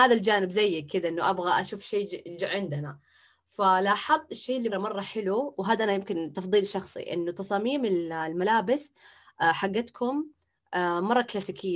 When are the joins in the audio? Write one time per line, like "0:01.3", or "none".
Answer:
0:04.7